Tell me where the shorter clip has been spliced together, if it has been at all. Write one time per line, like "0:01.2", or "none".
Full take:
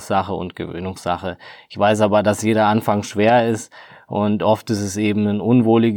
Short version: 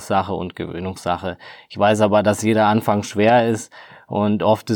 none